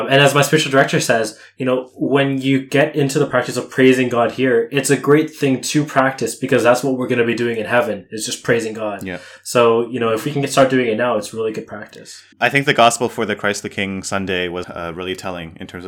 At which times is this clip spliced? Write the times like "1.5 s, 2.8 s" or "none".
12.3 s, 14.6 s